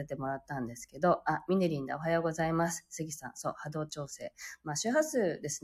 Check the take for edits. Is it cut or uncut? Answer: uncut